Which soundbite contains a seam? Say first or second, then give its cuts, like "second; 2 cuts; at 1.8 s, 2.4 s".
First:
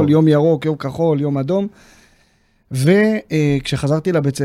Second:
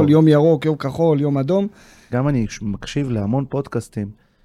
second; 1 cut; at 2.1 s